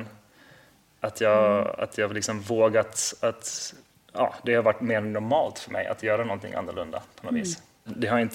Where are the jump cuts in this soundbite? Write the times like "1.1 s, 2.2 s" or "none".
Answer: none